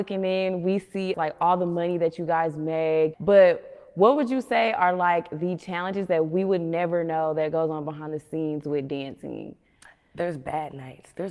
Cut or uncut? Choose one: cut